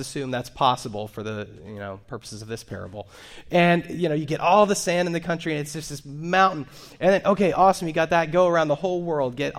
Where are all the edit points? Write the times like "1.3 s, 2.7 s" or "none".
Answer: none